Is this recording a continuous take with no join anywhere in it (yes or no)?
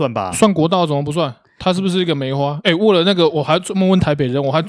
yes